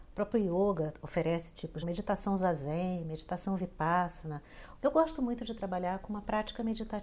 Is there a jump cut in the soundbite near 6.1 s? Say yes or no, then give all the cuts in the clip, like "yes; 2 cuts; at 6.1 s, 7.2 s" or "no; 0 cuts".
no; 2 cuts; at 1.8 s, 4.8 s